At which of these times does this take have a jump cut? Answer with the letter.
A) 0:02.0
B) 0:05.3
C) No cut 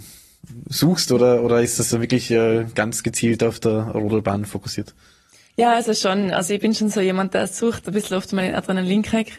C